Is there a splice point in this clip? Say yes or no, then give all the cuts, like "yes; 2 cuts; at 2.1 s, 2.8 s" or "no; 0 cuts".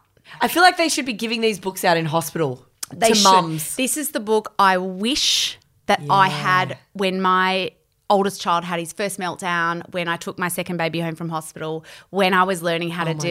no; 0 cuts